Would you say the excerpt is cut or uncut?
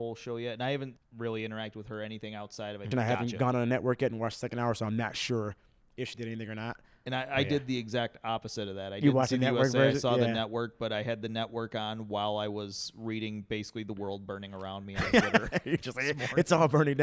cut